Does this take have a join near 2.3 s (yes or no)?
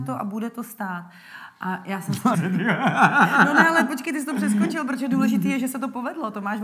yes